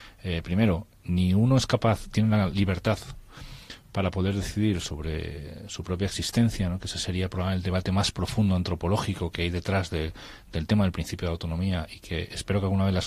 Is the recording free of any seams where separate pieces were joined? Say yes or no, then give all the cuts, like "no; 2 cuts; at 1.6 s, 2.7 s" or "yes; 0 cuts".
yes; 0 cuts